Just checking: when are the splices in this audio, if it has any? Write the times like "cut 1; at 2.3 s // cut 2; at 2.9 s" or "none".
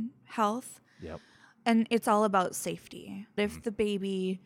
cut 1; at 3.4 s